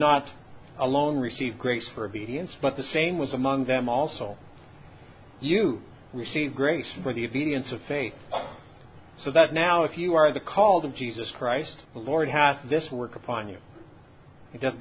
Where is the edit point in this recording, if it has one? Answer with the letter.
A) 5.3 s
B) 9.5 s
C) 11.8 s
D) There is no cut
C